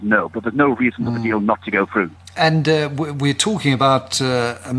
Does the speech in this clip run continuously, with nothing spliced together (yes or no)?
yes